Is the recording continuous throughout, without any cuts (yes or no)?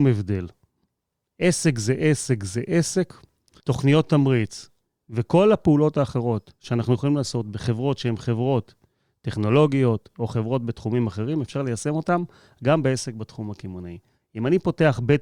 no